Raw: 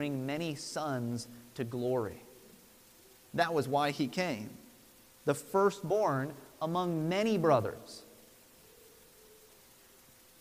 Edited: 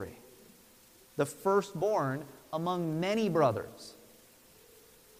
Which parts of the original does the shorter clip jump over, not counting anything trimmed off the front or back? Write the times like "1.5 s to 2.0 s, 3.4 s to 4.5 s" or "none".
3.1 s to 5.1 s

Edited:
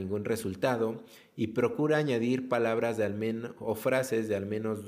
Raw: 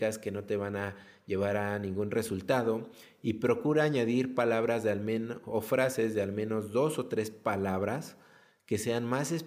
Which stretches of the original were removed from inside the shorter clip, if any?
none

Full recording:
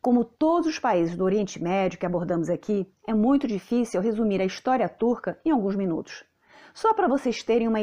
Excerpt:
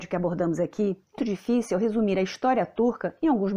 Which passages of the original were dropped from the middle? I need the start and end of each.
3.1 s to 3.4 s

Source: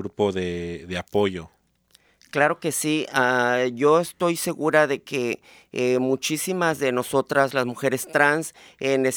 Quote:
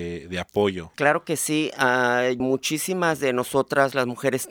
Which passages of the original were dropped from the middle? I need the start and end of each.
1.5 s to 2.3 s, 3.8 s to 6.0 s

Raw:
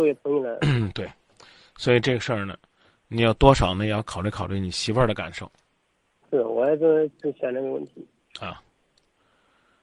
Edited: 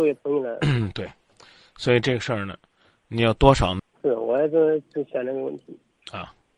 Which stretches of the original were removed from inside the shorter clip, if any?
3.8 s to 6.1 s

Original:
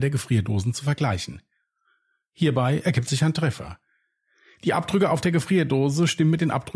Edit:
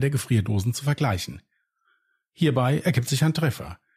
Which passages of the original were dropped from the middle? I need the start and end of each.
none

